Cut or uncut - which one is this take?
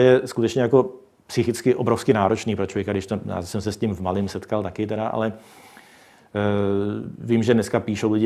uncut